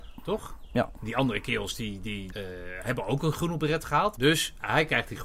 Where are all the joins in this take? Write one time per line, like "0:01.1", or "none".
0:02.3
0:04.2